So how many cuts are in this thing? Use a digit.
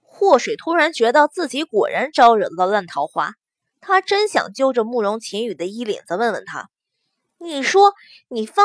0